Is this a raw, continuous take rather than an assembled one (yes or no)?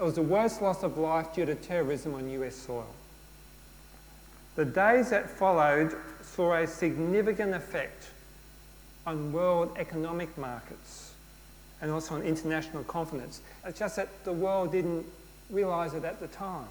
no